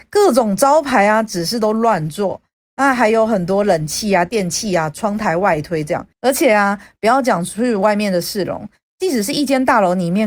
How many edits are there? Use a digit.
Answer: 1